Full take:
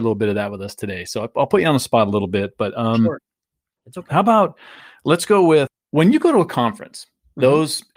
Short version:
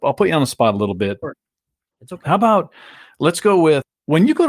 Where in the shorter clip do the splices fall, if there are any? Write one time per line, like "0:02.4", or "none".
0:01.2